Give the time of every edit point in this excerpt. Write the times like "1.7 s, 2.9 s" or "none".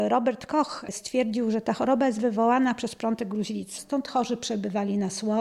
3.8 s